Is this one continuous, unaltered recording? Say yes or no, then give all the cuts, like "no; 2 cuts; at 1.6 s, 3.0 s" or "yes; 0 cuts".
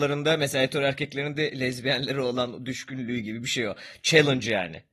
yes; 0 cuts